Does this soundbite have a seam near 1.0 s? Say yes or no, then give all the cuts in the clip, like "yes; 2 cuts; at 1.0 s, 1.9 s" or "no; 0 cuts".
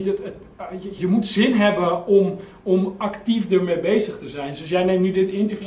yes; 1 cut; at 1.0 s